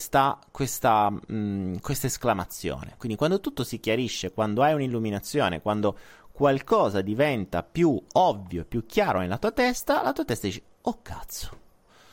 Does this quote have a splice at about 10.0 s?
no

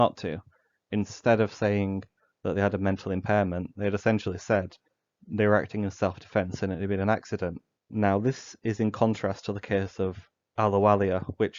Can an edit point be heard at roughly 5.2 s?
no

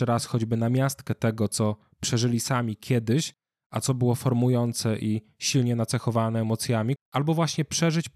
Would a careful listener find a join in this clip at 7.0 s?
yes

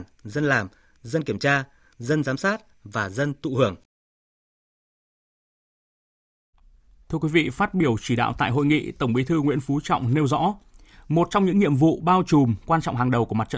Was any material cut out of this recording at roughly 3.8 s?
no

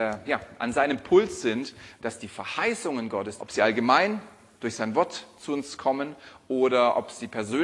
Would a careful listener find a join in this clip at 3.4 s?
yes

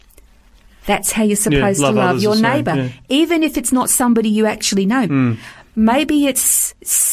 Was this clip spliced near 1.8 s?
no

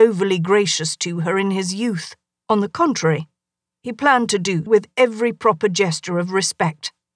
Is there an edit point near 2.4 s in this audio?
yes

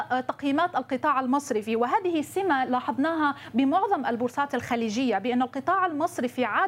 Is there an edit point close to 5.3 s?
no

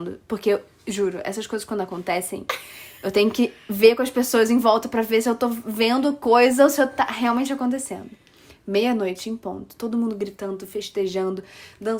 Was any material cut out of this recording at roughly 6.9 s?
no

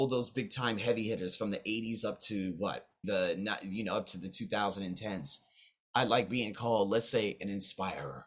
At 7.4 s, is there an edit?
no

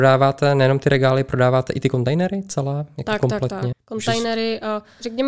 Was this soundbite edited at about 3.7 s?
yes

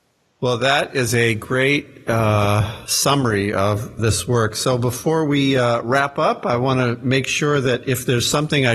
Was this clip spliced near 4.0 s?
yes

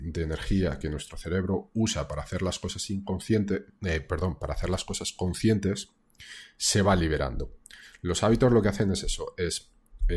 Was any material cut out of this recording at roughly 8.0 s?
no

